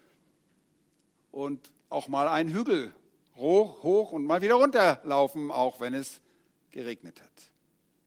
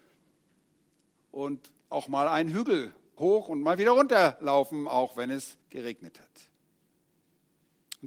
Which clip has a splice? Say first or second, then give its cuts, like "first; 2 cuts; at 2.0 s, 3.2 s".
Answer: second; 2 cuts; at 3.2 s, 5.6 s